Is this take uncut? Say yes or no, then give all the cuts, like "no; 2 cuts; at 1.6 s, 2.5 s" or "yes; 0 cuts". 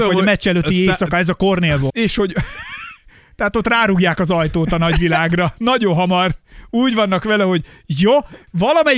no; 1 cut; at 1.9 s